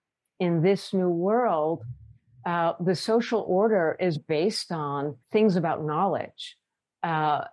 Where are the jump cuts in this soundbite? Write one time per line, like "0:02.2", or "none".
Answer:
0:04.1
0:05.2